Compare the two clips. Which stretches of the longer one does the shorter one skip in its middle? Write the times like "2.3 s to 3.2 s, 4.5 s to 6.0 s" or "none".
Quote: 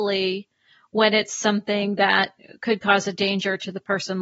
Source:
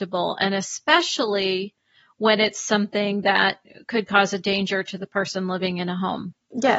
none